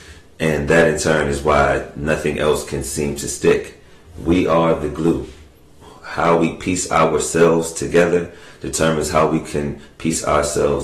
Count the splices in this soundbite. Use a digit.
0